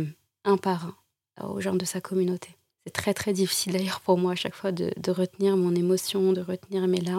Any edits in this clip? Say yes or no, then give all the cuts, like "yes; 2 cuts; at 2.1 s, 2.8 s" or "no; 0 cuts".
yes; 1 cut; at 2.8 s